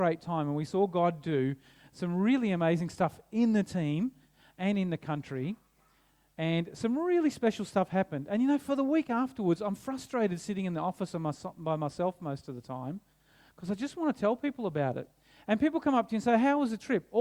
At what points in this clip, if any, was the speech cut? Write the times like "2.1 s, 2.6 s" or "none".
none

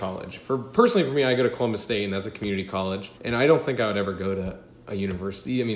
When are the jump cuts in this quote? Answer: 3.2 s

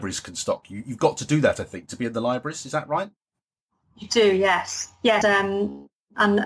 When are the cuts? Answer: 5.2 s

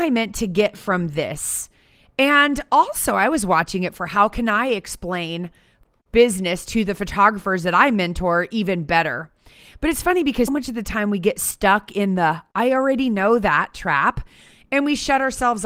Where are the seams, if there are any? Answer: 10.5 s

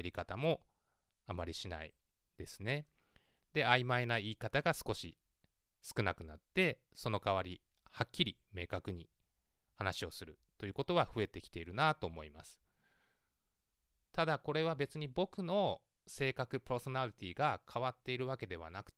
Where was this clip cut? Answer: none

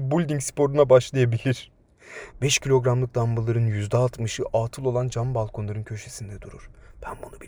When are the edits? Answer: 2.3 s

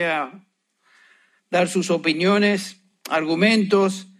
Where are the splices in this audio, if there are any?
none

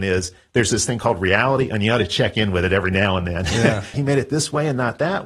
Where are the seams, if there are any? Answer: 3.9 s

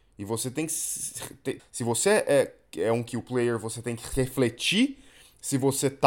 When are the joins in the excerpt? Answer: 1.6 s

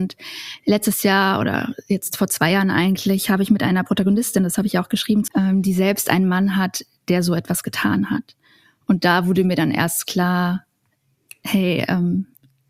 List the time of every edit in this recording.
5.3 s

